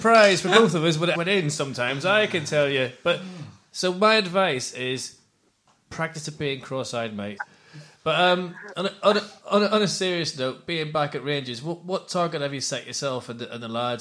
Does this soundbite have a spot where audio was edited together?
yes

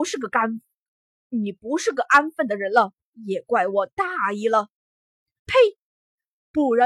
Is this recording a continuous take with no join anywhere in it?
no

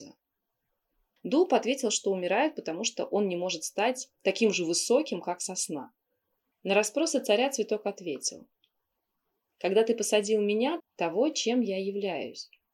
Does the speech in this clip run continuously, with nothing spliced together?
no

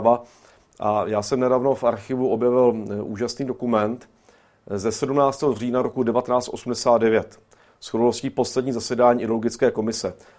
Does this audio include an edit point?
no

